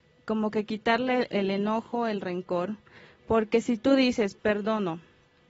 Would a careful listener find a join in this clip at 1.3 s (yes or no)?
yes